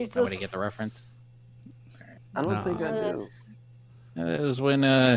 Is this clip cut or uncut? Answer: uncut